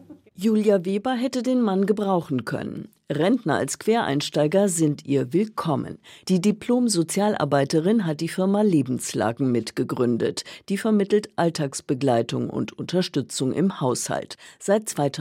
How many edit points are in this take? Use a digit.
0